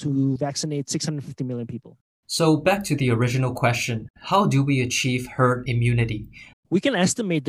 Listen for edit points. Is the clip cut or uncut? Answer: cut